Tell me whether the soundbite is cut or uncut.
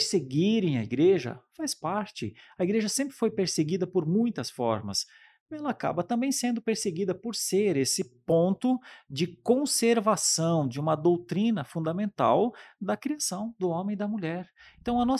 uncut